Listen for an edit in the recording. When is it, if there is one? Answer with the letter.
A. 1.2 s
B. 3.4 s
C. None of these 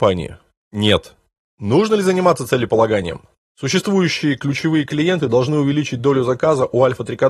B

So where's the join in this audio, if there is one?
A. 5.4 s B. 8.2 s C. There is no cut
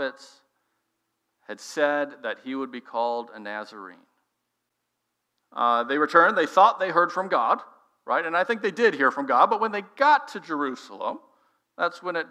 A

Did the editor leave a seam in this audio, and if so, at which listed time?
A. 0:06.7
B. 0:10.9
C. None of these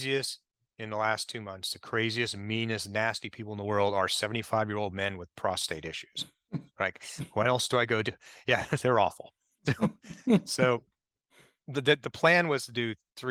A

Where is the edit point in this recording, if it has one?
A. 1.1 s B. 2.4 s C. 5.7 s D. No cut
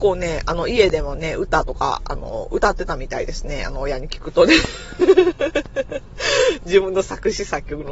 D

